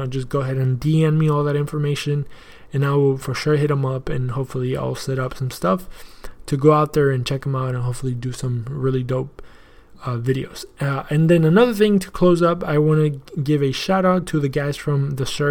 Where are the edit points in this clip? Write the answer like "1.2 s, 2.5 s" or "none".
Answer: none